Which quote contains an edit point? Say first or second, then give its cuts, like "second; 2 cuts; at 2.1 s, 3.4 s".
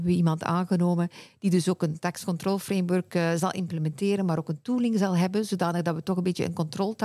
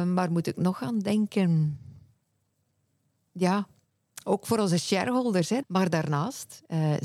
second; 1 cut; at 5.6 s